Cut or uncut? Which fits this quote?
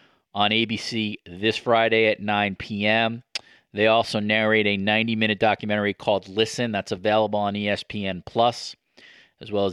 uncut